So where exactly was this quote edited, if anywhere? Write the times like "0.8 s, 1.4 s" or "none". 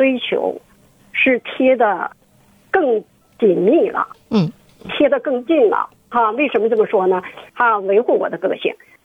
7.5 s